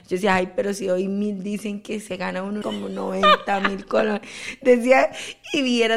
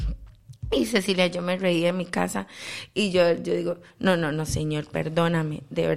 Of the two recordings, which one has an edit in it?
first; 1 cut; at 2.6 s

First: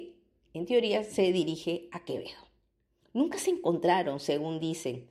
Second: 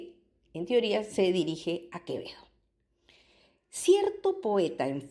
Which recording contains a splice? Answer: first; 1 cut; at 3.0 s

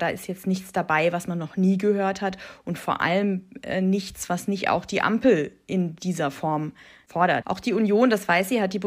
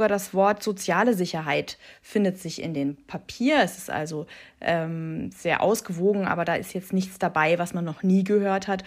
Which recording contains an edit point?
first; 1 cut; at 7.4 s

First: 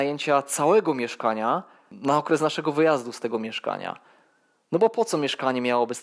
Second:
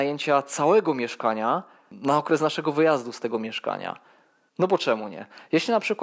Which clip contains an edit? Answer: second; 1 cut; at 4.5 s

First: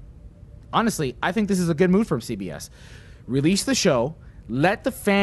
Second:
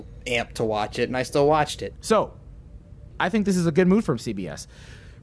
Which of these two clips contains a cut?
second; 2 cuts; at 1.9 s, 3.1 s

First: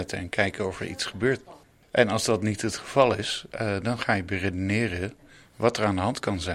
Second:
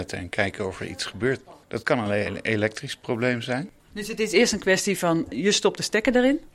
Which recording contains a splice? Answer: second; 2 cuts; at 1.6 s, 3.8 s

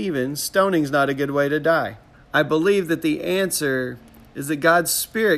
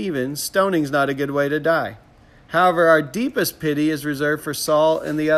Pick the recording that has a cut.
first; 1 cut; at 2.1 s

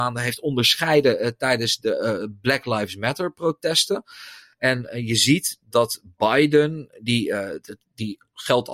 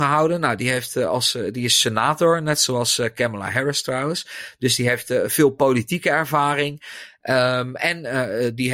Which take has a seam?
first; 1 cut; at 4.5 s

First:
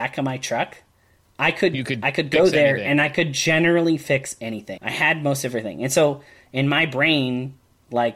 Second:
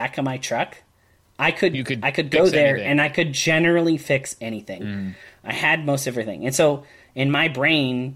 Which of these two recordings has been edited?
first; 1 cut; at 4.8 s

